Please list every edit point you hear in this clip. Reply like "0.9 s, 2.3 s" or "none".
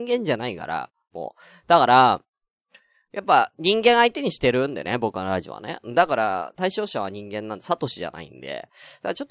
none